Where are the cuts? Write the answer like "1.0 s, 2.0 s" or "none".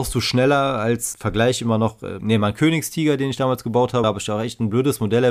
1.1 s, 2.2 s, 4.0 s